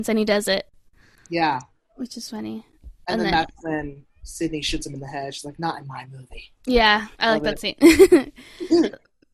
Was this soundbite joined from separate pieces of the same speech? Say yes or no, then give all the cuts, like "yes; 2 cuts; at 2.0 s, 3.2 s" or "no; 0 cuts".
yes; 1 cut; at 7.1 s